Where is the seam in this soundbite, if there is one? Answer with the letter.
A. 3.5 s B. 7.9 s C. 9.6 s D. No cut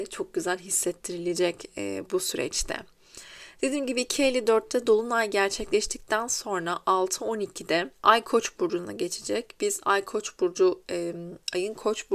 B